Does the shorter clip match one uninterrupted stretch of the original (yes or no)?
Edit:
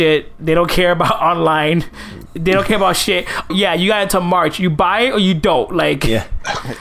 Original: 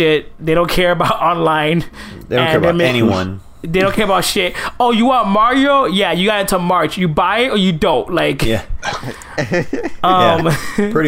no